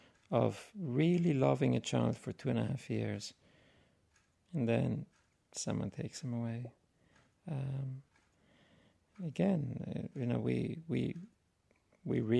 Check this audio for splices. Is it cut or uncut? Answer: uncut